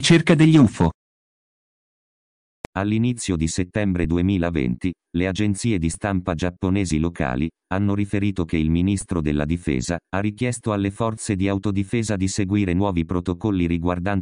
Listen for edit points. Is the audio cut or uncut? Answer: cut